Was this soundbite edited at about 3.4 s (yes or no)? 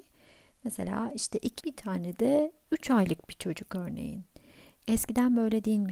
no